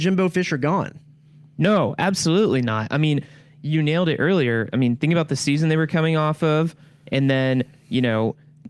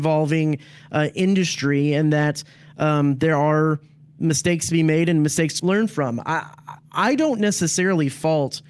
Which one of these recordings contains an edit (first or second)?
second